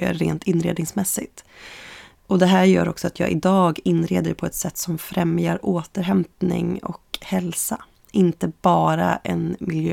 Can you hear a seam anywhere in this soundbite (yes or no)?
no